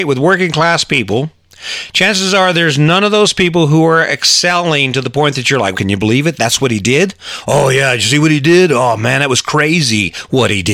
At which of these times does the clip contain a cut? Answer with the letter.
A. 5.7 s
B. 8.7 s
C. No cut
A